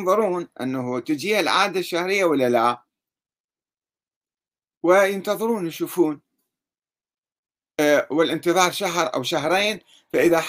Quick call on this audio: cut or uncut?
uncut